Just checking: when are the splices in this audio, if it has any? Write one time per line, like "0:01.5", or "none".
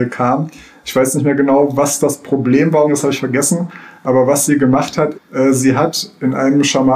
0:02.9
0:05.1